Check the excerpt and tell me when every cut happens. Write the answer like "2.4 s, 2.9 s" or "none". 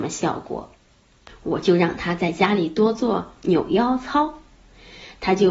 1.3 s